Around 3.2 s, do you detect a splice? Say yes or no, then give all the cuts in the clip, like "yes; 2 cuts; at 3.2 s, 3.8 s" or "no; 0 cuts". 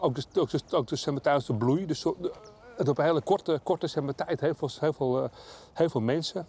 no; 0 cuts